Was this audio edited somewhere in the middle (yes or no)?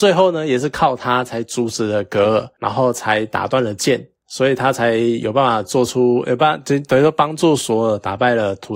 no